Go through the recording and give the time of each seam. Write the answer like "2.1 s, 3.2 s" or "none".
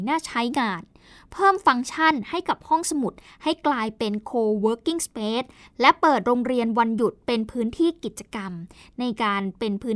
none